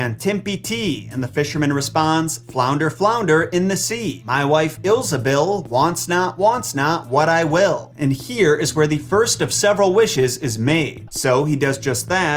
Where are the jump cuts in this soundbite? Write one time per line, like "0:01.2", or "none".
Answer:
0:04.8
0:07.9
0:11.1